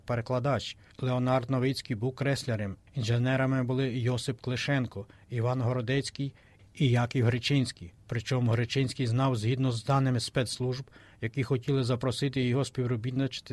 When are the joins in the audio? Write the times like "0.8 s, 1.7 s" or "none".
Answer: 0.9 s